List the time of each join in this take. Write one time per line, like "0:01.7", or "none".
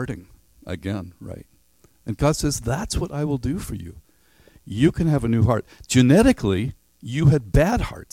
none